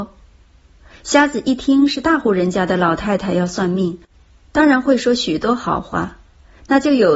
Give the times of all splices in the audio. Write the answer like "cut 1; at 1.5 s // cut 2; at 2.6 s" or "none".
none